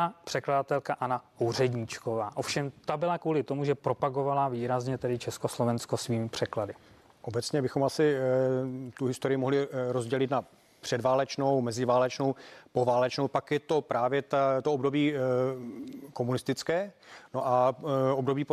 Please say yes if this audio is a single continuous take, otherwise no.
yes